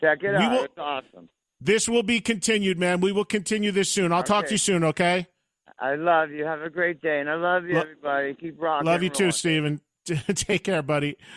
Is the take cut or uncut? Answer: uncut